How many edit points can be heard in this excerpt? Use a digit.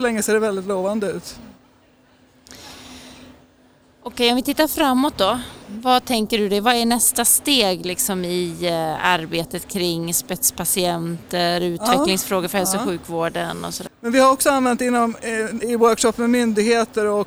2